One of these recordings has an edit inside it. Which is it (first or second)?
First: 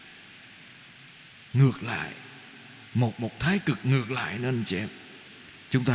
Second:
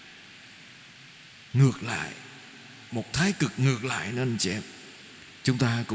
second